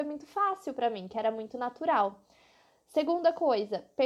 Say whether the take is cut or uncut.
uncut